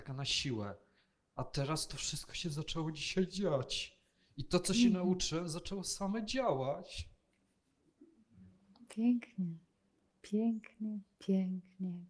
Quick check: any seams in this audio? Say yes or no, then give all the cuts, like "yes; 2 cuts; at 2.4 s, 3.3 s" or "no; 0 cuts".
no; 0 cuts